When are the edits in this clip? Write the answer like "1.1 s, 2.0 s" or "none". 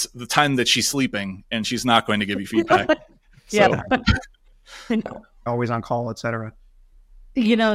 5.5 s

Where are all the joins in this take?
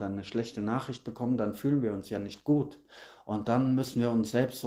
none

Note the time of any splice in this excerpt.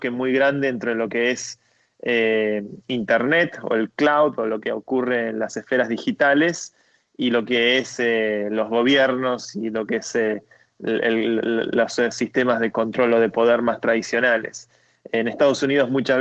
none

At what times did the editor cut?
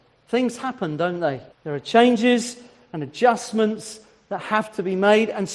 1.5 s

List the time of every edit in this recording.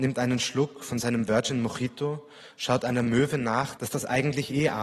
3.8 s

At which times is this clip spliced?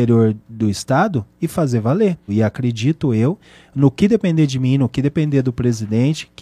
2.3 s

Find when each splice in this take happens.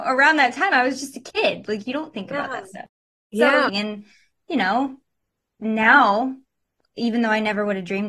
3.7 s

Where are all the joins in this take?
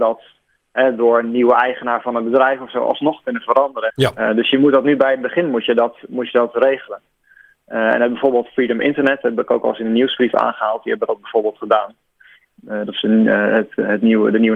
3.9 s

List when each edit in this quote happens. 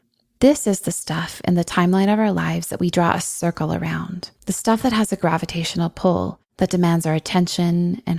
4.4 s

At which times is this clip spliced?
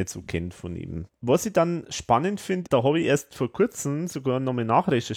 1.1 s, 2.7 s

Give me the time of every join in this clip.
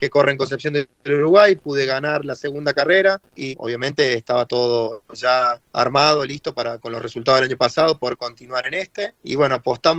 3.5 s

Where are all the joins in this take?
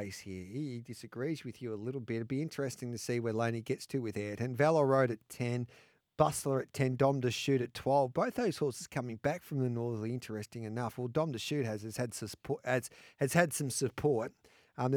none

